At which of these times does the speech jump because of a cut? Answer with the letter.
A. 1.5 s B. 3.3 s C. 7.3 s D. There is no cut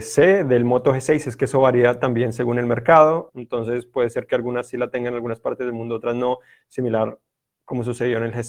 B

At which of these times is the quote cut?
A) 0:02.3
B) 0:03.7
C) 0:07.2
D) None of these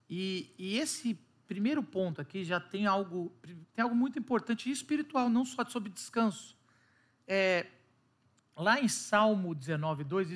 B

